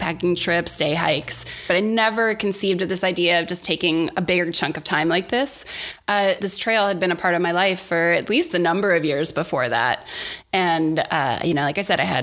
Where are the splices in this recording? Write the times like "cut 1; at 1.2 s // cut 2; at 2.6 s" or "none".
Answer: cut 1; at 6.4 s